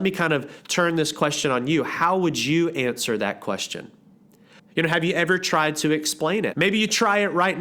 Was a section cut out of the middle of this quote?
yes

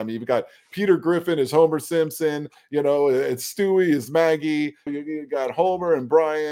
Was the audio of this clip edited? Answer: yes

